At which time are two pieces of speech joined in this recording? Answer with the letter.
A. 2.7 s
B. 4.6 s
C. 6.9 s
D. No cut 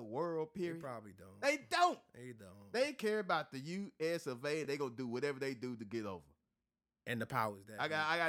D